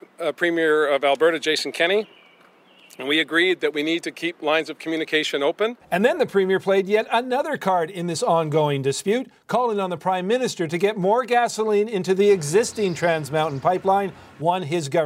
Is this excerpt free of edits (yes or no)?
yes